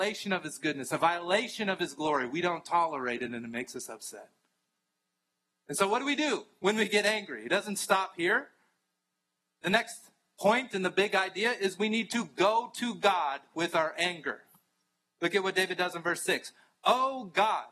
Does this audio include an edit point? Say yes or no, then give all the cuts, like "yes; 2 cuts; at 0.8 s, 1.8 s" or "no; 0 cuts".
no; 0 cuts